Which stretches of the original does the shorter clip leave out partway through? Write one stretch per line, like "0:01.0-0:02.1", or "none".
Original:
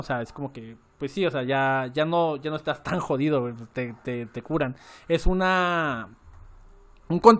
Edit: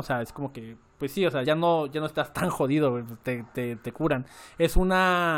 0:01.4-0:01.9